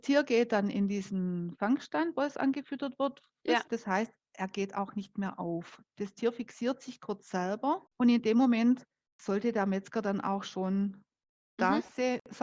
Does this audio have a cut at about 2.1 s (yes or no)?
no